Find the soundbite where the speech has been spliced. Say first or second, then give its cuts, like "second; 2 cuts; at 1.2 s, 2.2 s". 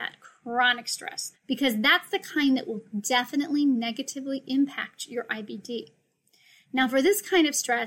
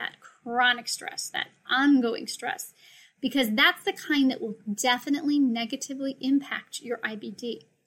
first; 1 cut; at 1.3 s